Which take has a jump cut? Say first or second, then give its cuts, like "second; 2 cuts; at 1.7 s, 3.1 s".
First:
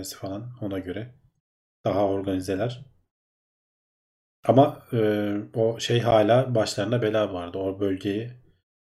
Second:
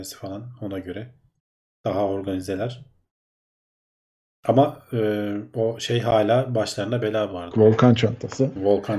second; 1 cut; at 7.5 s